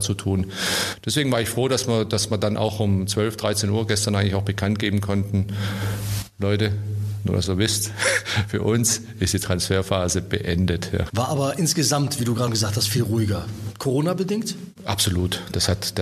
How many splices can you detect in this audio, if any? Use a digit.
2